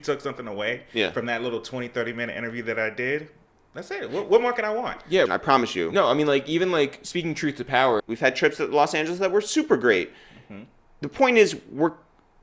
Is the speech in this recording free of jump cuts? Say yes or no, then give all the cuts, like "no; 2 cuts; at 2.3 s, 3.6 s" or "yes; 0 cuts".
no; 2 cuts; at 5.3 s, 8.0 s